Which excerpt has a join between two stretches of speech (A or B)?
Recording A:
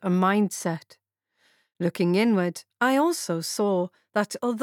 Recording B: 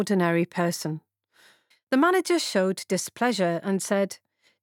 B